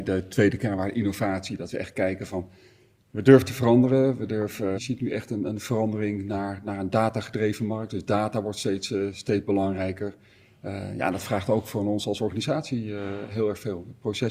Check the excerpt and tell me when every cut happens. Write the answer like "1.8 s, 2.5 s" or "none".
4.7 s